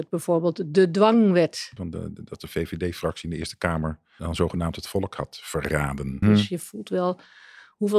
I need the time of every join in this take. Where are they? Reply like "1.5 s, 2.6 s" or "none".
1.8 s, 4.2 s, 6.2 s